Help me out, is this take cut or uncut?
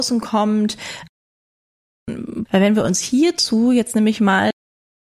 cut